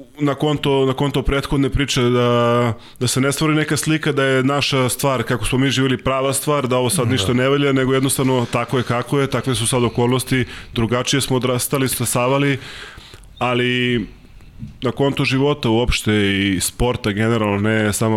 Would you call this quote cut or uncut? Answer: uncut